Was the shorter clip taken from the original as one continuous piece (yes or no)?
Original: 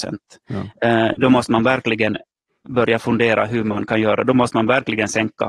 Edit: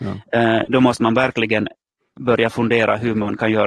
yes